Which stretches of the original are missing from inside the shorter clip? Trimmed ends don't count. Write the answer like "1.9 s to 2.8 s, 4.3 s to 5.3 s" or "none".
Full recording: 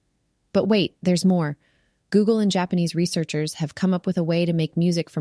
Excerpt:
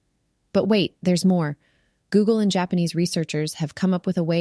none